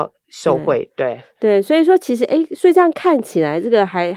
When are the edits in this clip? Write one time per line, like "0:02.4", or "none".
none